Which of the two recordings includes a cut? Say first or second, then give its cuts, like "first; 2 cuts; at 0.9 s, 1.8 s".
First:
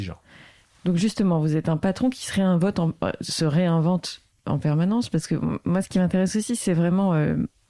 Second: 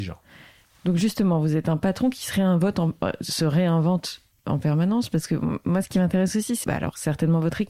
second; 1 cut; at 6.6 s